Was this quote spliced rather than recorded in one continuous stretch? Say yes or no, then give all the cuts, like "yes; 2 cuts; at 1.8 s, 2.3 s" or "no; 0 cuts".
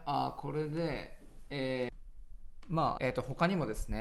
yes; 1 cut; at 3.0 s